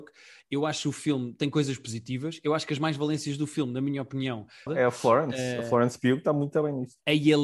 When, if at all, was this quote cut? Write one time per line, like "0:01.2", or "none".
0:04.7